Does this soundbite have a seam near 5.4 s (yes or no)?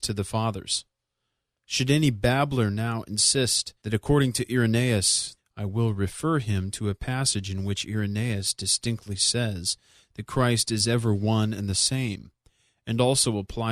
yes